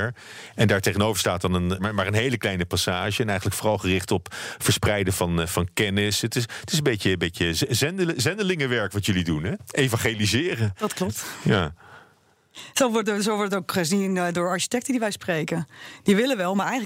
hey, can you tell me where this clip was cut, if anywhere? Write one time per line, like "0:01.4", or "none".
0:01.8